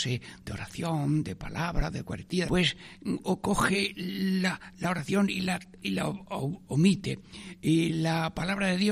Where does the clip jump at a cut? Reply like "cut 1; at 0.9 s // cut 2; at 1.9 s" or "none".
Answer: cut 1; at 2.5 s